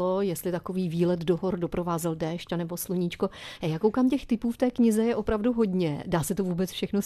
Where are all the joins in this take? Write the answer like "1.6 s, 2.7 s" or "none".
none